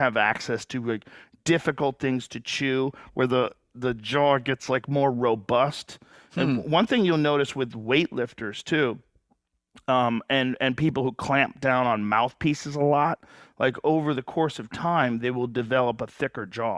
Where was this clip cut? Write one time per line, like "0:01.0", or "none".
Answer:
none